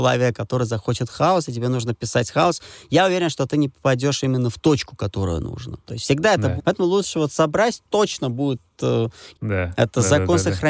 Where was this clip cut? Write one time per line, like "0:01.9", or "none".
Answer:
0:06.6
0:09.3